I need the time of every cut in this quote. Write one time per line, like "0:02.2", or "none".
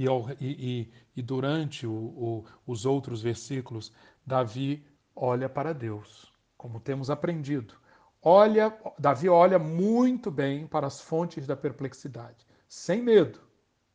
none